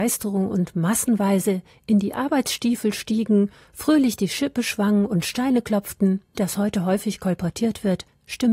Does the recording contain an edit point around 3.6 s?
no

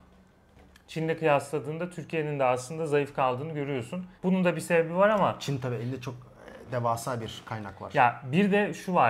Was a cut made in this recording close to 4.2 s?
yes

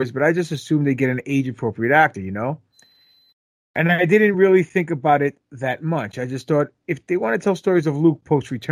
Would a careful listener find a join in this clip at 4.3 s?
no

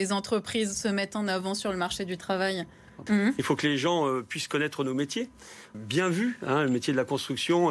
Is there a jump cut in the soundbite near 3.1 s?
yes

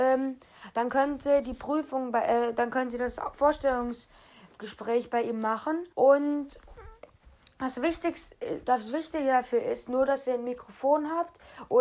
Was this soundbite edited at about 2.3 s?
no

